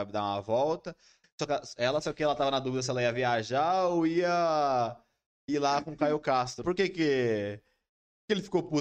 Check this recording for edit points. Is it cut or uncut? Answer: cut